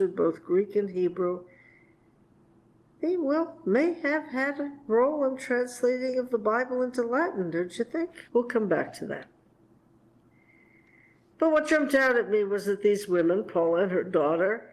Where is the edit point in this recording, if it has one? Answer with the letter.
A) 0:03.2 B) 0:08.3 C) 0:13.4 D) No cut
B